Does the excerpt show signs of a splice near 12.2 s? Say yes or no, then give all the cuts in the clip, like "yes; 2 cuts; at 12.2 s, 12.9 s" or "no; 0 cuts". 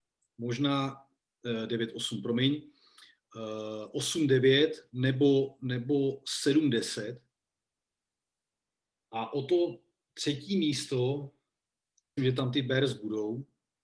yes; 1 cut; at 12.2 s